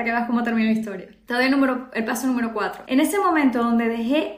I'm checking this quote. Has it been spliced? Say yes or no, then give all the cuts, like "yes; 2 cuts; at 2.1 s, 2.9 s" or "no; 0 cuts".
yes; 1 cut; at 2.9 s